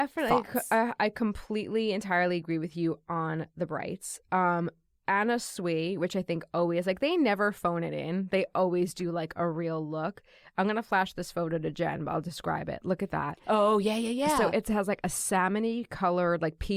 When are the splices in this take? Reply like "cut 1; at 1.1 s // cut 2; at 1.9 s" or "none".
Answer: none